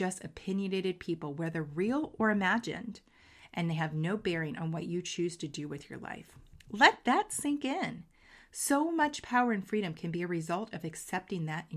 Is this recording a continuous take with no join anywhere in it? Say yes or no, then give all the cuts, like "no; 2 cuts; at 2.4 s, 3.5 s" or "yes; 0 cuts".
yes; 0 cuts